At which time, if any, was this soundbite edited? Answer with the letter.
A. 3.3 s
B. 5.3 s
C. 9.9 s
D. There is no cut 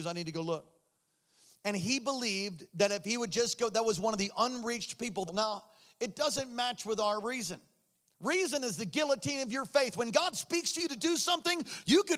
B